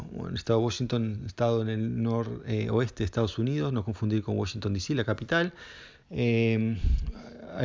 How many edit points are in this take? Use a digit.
1